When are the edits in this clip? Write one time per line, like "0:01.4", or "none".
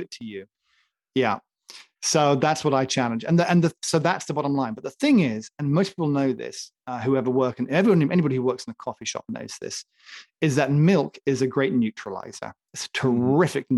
none